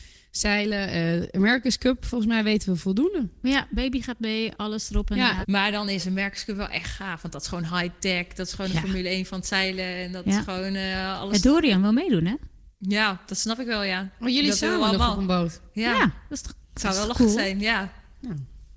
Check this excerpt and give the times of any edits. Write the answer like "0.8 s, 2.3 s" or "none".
5.4 s